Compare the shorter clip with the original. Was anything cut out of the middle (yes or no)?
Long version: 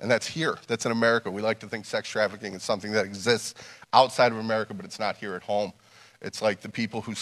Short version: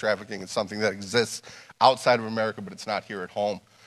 no